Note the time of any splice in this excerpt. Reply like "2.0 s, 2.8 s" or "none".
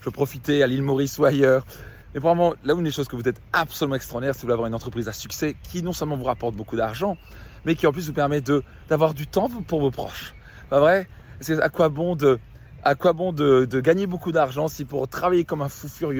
2.0 s